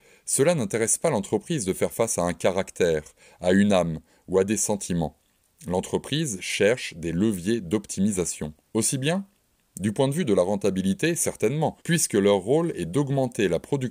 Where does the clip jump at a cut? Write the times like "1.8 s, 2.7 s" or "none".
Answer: 8.7 s, 11.8 s